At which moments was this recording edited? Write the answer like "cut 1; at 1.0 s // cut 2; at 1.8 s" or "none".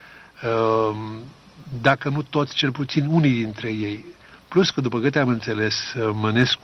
none